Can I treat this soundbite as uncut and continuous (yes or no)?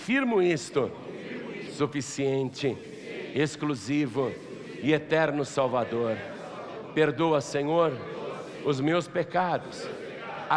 no